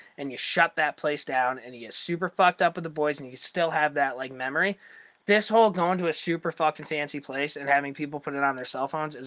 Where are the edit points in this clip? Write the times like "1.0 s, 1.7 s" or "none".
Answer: none